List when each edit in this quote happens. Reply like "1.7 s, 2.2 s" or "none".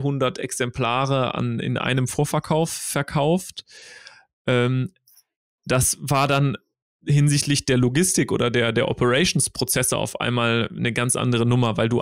none